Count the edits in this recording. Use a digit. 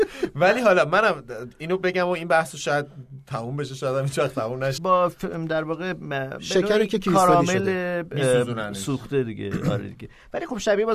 1